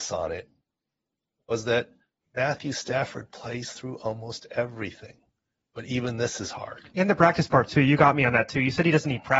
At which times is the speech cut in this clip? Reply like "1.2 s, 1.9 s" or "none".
none